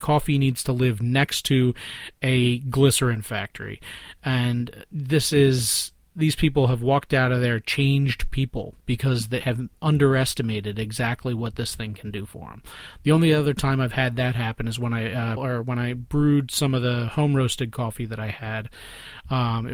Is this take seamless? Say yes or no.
no